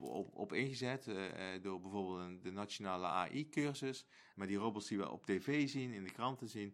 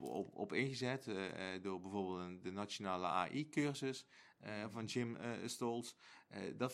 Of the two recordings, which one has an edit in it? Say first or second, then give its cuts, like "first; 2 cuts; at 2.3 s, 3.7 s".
first; 1 cut; at 4.3 s